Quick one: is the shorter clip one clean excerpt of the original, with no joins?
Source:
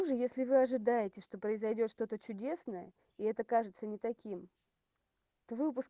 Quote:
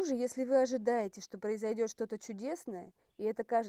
yes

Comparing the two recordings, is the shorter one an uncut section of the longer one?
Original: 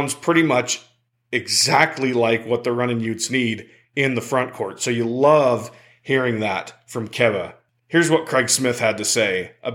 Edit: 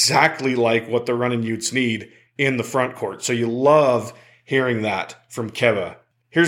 yes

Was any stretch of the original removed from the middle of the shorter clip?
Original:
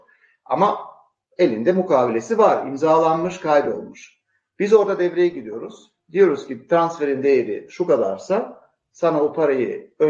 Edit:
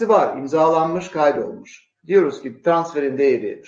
yes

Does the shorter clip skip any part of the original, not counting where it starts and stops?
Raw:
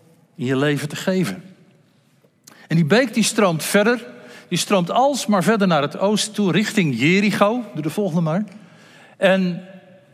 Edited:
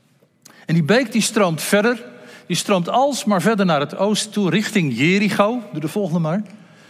no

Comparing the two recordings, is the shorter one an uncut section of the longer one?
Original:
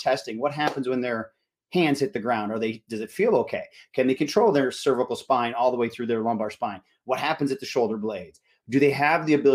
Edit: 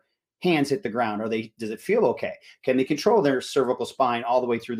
yes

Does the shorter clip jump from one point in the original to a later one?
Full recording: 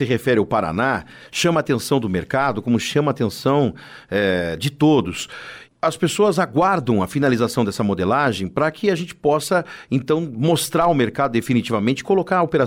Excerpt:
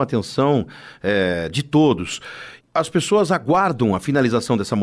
no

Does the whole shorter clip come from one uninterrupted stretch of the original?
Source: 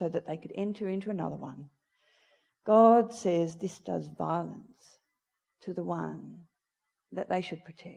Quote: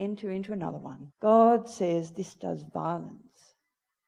no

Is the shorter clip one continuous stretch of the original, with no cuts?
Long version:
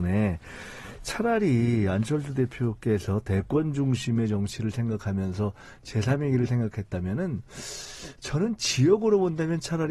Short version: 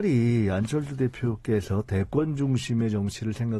yes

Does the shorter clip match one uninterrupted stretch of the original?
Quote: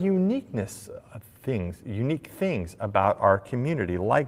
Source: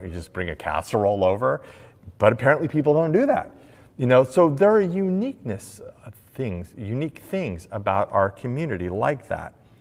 yes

